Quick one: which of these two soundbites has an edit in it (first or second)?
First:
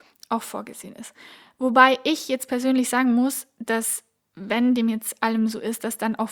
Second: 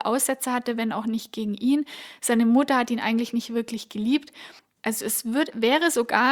second